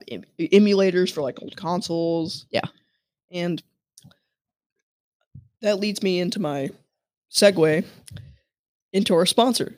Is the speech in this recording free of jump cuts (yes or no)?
yes